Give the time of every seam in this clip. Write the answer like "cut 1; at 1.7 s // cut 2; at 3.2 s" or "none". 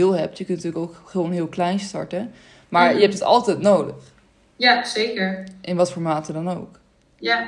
none